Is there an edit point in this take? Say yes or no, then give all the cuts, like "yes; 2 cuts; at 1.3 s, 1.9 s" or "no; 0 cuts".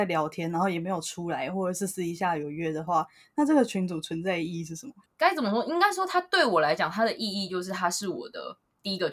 yes; 1 cut; at 5.1 s